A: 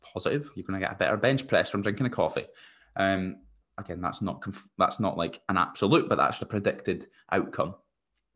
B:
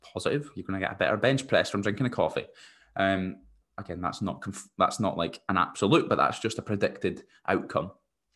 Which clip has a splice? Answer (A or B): A